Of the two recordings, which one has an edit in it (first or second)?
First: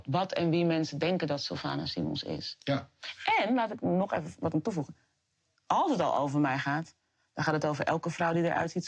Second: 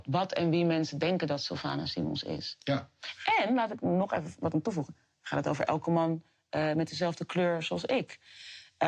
second